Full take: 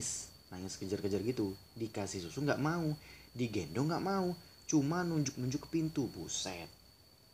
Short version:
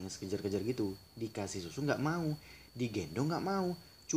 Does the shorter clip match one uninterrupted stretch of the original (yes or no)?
yes